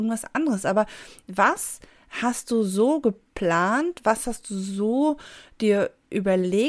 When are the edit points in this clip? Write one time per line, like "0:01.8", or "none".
none